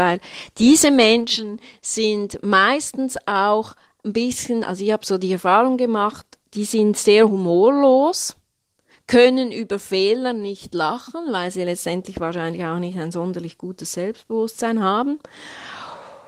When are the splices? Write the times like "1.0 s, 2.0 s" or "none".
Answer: none